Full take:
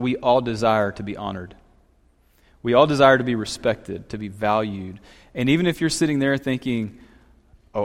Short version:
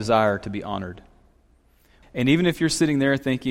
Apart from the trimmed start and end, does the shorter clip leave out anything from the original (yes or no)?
yes